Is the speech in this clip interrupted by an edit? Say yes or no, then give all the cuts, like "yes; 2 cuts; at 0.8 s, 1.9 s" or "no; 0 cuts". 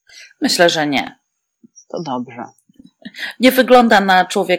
no; 0 cuts